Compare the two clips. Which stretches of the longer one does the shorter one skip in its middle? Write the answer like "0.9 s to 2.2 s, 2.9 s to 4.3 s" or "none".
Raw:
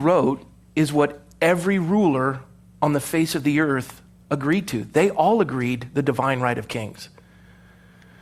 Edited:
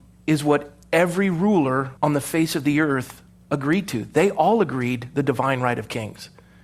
2.5 s to 2.8 s